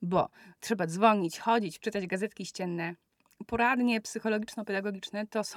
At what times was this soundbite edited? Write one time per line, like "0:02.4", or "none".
0:01.8